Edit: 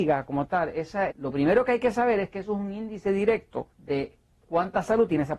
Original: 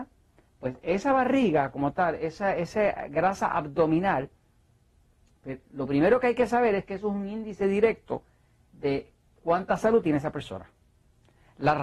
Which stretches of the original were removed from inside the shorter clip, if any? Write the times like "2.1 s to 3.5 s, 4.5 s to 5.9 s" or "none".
2.6 s to 5.6 s, 8.3 s to 8.7 s